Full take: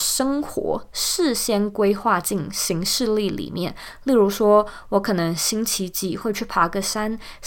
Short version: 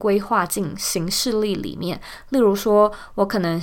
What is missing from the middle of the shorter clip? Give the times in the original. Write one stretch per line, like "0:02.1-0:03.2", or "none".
none